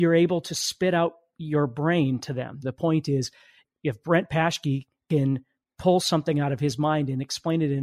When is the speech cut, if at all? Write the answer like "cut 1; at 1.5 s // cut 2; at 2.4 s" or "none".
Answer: cut 1; at 2.6 s